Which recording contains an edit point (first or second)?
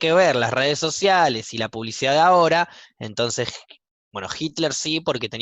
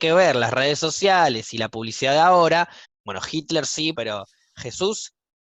second